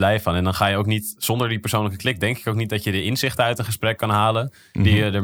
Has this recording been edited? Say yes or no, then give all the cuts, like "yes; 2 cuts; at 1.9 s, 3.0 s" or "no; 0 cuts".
no; 0 cuts